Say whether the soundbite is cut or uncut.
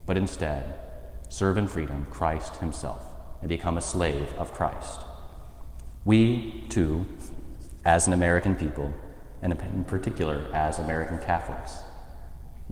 uncut